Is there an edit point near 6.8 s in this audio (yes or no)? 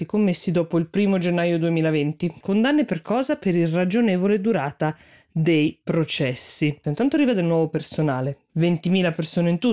yes